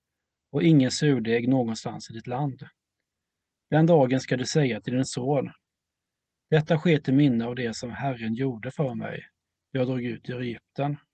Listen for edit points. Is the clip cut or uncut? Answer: uncut